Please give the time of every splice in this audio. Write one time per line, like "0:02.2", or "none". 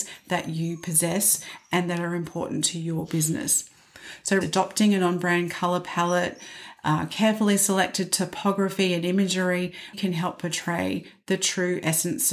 0:04.4
0:09.9